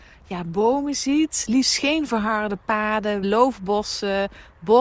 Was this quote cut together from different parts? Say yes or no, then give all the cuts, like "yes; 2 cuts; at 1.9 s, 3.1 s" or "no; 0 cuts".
yes; 1 cut; at 3.2 s